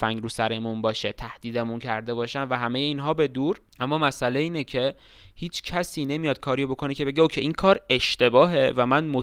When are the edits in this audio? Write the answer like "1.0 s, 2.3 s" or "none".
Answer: 3.7 s